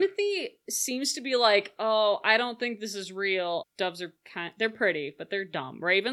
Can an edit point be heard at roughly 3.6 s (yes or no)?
yes